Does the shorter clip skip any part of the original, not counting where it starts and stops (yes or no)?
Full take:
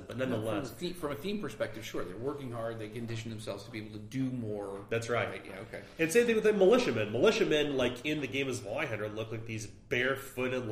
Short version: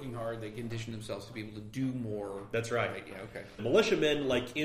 yes